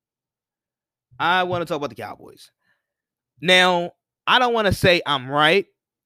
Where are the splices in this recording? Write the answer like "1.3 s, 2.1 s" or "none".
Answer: none